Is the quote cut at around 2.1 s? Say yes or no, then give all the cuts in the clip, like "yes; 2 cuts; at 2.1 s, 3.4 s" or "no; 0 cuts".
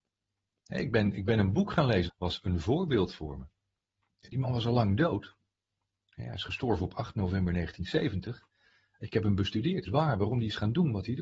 yes; 2 cuts; at 2.1 s, 9.9 s